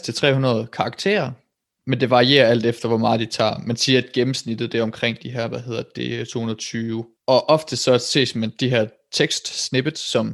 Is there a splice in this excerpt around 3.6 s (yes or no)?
no